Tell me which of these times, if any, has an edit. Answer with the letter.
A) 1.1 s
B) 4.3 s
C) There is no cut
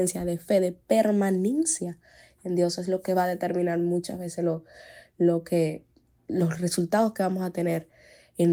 C